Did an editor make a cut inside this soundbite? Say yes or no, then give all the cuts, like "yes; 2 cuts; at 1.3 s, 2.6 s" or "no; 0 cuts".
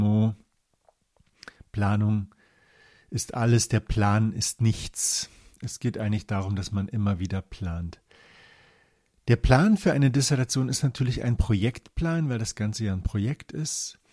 no; 0 cuts